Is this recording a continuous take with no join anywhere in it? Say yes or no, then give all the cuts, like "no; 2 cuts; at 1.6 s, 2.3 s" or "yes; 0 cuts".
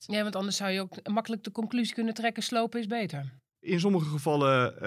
yes; 0 cuts